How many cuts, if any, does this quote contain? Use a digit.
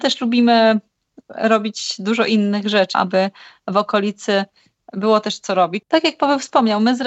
2